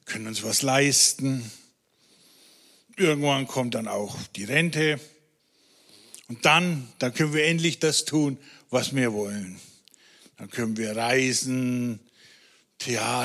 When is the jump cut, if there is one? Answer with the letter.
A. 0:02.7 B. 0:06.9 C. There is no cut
C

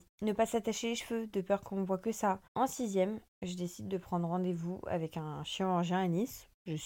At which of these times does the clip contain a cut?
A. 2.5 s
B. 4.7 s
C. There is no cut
A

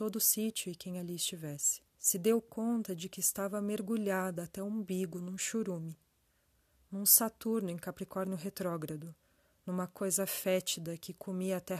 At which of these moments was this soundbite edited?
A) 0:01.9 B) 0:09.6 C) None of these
A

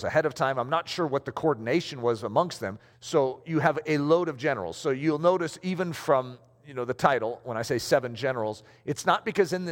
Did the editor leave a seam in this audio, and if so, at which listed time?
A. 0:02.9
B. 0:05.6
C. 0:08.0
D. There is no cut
A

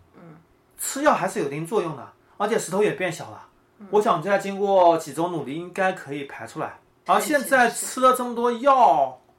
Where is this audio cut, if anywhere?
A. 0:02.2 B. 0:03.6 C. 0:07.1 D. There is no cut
C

